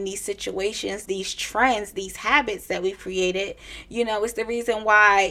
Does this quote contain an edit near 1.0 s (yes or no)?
yes